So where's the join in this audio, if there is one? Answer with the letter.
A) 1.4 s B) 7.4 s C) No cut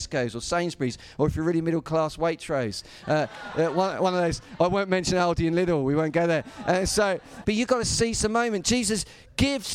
B